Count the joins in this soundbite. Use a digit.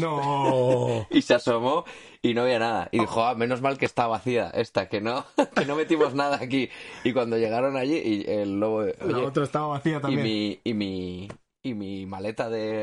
0